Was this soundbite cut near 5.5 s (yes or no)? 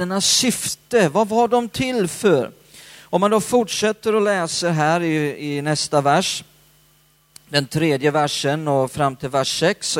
no